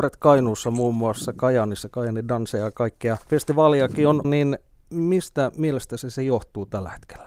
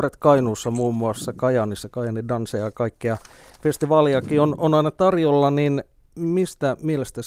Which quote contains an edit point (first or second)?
first